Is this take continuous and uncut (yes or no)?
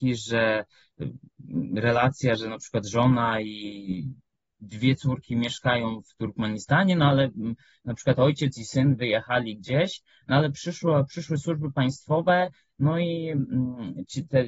yes